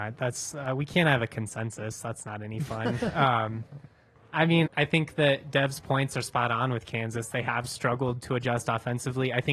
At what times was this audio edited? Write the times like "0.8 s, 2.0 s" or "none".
4.7 s